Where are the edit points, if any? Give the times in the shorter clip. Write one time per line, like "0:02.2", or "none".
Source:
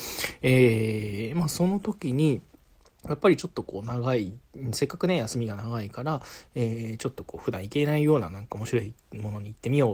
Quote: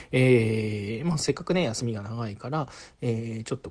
0:01.2